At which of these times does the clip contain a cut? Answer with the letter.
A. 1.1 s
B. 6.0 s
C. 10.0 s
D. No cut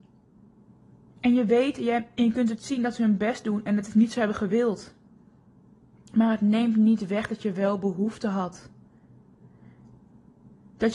D